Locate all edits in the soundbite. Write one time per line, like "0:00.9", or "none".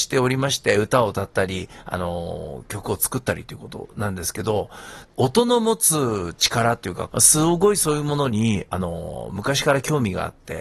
0:05.0
0:07.1